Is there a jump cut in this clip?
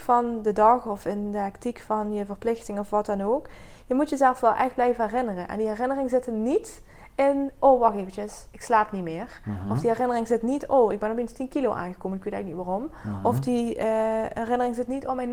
no; 0 cuts

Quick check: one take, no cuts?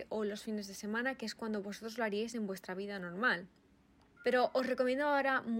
no; 1 cut; at 4.2 s

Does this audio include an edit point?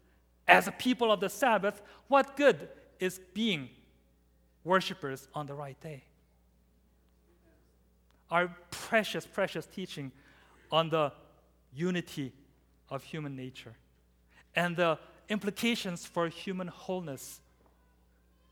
no; 0 cuts

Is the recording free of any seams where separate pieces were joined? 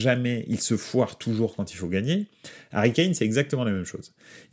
yes; 0 cuts

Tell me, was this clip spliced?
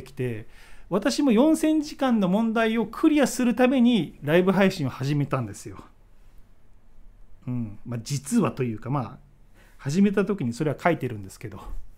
no; 0 cuts

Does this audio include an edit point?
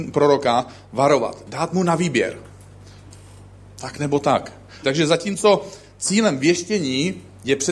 yes; 1 cut; at 4.8 s

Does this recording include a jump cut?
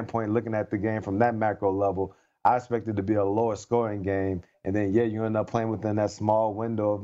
no; 0 cuts

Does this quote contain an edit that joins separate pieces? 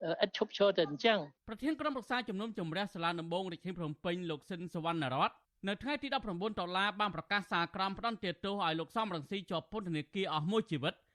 yes; 1 cut; at 1.4 s

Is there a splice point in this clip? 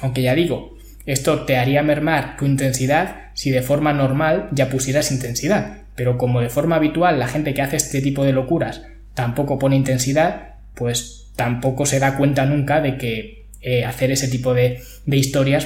no; 0 cuts

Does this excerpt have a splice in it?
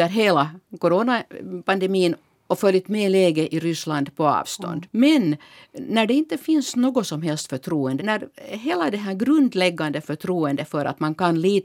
yes; 2 cuts; at 4.9 s, 8.0 s

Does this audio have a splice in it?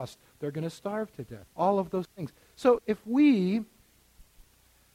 yes; 2 cuts; at 1.5 s, 2.8 s

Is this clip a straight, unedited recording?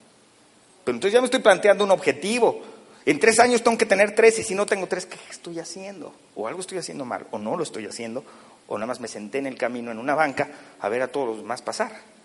yes; 0 cuts

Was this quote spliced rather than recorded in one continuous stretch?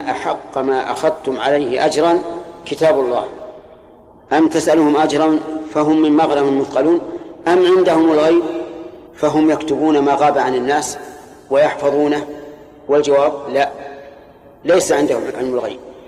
yes; 1 cut; at 9.1 s

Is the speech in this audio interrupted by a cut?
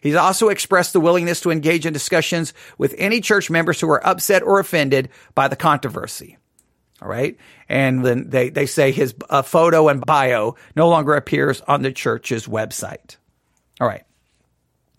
yes; 2 cuts; at 8.0 s, 10.0 s

